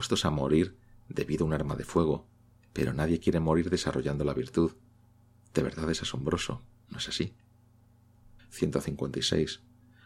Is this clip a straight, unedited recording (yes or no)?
no